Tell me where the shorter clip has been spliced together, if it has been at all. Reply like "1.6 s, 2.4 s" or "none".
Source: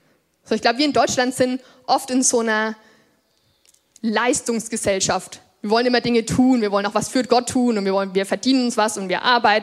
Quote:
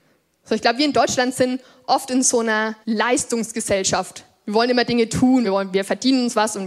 2.8 s, 5.4 s